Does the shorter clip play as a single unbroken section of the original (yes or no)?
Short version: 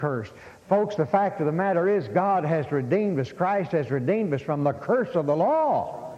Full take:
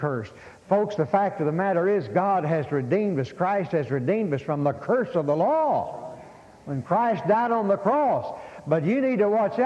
yes